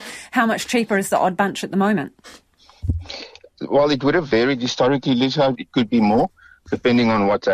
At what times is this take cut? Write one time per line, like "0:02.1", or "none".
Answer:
0:05.5